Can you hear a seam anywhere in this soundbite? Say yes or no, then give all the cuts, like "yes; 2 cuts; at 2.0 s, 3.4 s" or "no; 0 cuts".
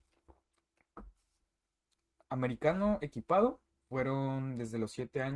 yes; 1 cut; at 3.7 s